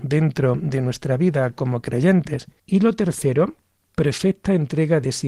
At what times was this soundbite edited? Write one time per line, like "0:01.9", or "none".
0:02.5

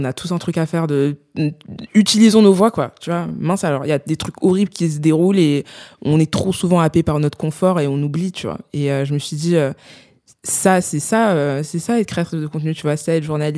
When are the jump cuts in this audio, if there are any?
none

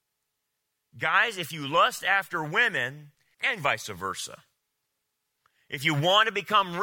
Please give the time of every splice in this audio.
0:03.3

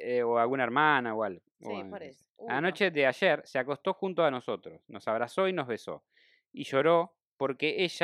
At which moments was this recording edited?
none

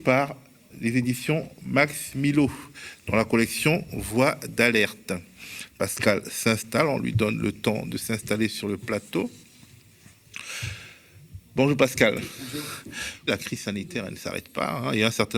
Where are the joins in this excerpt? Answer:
0:13.3

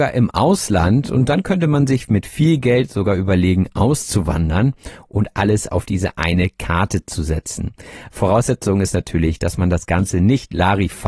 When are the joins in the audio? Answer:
none

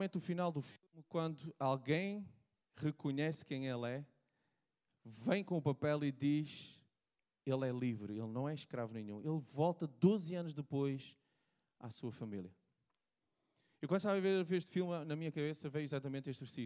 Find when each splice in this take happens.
none

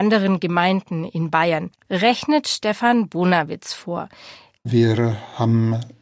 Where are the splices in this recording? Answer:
0:01.8
0:04.6

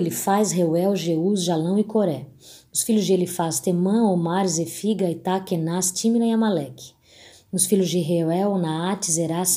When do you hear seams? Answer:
none

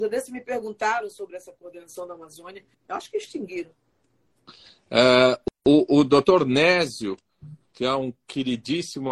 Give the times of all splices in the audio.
0:02.7

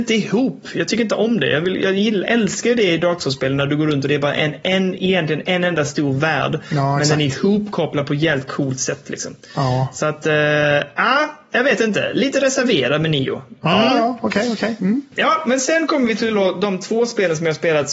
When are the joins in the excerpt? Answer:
none

